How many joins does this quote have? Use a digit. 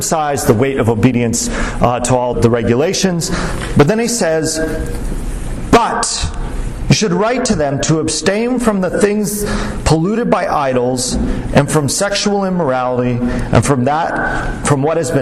1